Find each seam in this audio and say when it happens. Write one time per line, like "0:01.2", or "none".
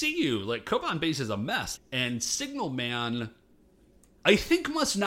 0:01.8